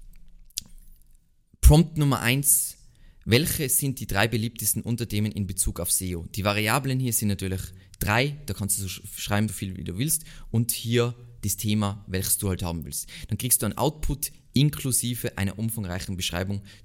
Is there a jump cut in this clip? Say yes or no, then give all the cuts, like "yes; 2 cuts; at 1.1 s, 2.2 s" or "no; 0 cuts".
yes; 1 cut; at 9.5 s